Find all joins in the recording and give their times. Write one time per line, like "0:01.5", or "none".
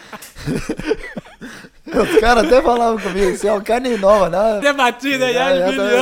0:04.6